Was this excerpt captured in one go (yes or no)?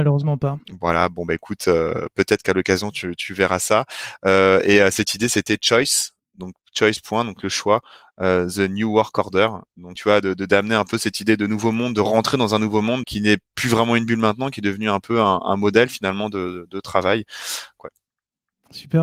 no